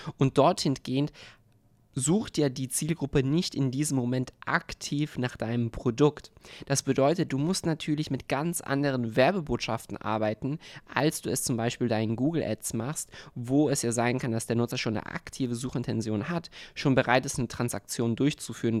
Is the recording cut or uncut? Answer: uncut